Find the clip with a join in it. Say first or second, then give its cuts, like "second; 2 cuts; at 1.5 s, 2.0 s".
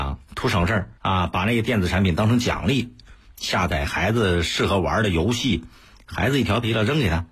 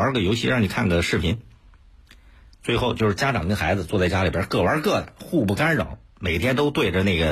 first; 1 cut; at 1.0 s